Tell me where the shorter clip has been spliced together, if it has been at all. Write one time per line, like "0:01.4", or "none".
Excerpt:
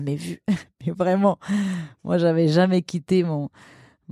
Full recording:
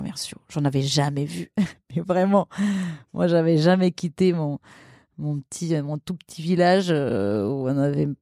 none